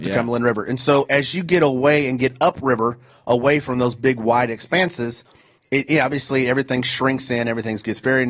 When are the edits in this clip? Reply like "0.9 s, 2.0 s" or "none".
none